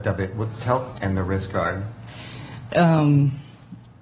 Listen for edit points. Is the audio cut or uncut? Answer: cut